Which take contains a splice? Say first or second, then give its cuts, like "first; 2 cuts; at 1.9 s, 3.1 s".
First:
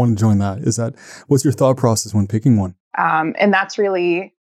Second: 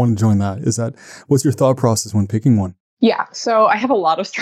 first; 1 cut; at 2.9 s